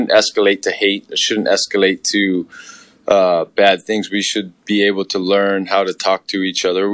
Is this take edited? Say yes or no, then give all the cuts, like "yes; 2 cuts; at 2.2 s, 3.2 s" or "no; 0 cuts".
no; 0 cuts